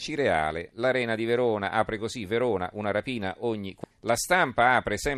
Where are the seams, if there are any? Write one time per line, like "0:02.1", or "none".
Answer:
0:03.9